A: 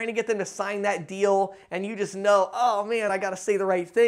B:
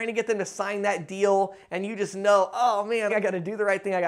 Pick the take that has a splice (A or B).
B